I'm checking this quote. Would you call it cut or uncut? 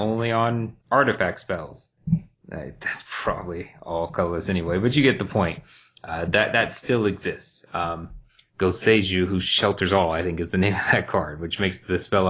uncut